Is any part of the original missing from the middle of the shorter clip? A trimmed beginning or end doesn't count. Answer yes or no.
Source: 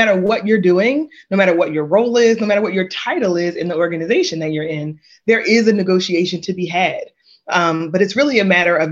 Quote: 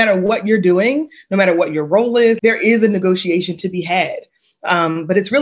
yes